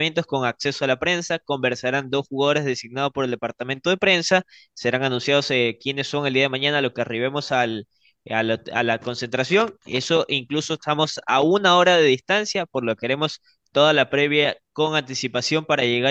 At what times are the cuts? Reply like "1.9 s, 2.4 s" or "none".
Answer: none